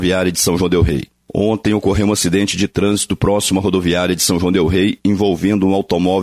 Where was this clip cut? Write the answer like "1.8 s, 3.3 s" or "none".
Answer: 1.2 s